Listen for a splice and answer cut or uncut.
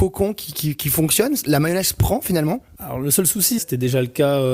cut